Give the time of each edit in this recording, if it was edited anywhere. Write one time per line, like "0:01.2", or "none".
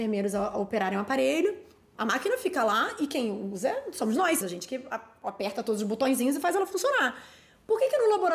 0:02.0
0:04.4